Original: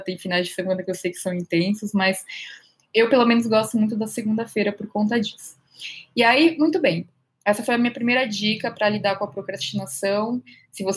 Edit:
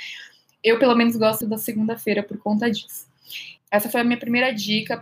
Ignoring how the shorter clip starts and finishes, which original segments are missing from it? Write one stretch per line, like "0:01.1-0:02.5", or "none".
0:03.7-0:03.9
0:06.1-0:07.3